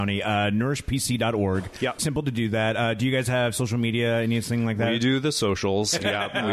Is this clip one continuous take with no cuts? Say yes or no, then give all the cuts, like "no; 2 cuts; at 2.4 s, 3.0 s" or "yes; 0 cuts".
no; 1 cut; at 2.0 s